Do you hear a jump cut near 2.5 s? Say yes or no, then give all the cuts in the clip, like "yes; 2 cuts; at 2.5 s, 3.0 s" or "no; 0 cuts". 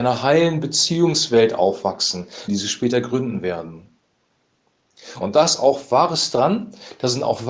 yes; 2 cuts; at 2.5 s, 5.2 s